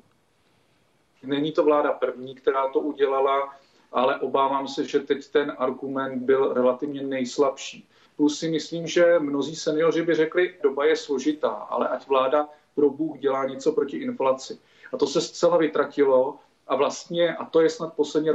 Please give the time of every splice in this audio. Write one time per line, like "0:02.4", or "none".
0:01.2
0:08.0
0:10.6